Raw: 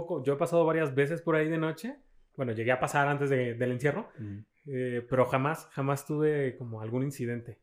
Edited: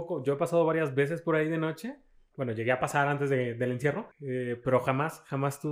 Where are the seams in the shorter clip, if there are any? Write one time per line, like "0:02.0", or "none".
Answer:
0:04.1